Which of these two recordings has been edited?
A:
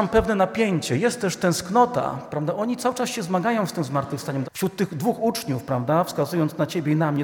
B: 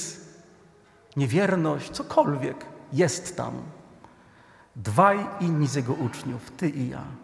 A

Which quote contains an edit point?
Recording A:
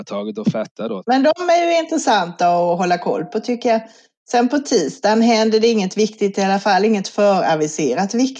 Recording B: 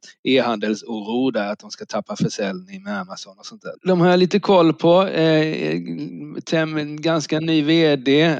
B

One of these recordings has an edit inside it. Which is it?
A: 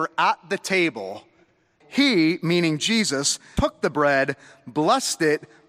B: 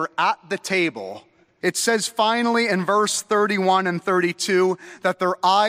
B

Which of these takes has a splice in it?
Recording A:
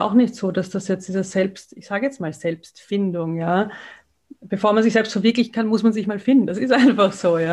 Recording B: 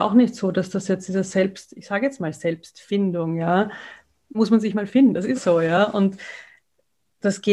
B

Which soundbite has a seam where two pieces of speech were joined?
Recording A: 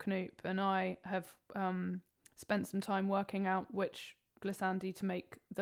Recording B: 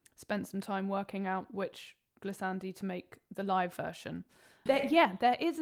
B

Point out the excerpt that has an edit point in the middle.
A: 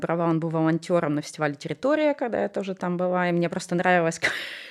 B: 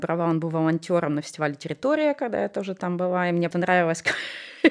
B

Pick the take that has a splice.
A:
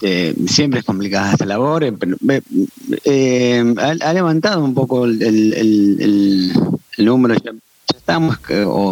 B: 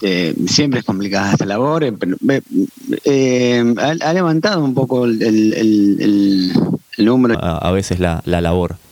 B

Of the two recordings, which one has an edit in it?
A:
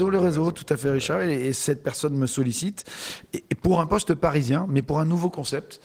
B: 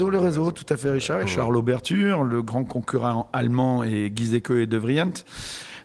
B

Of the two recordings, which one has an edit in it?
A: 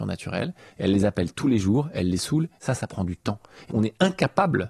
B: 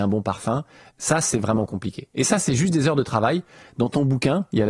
A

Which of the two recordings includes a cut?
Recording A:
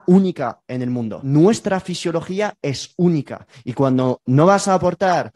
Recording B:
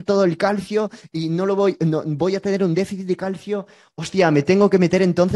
A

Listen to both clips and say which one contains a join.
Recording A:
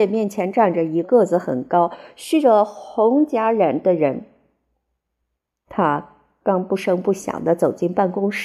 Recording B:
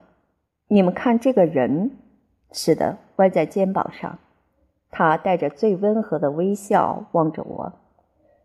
A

